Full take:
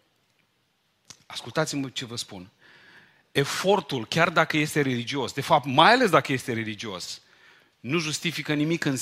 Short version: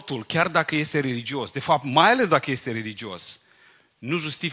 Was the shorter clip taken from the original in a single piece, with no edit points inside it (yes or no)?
yes